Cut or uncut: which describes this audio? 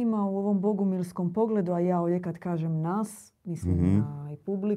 uncut